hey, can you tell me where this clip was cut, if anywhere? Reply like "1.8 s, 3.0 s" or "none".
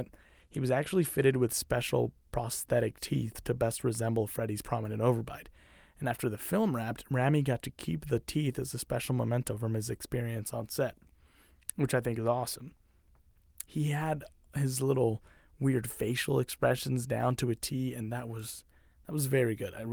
13.6 s